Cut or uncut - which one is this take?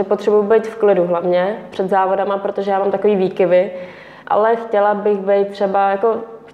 cut